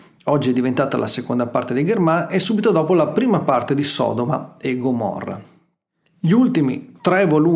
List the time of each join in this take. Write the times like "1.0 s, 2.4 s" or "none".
none